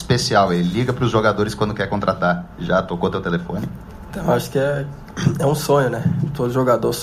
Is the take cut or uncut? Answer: uncut